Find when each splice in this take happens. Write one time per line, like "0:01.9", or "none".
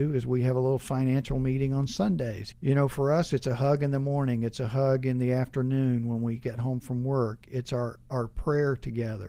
0:02.5